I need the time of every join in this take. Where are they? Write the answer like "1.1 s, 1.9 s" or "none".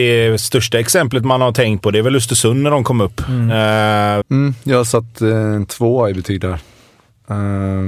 4.2 s